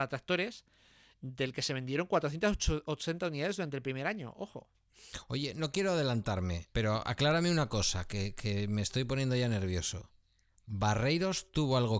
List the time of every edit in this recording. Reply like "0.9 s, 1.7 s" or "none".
6.7 s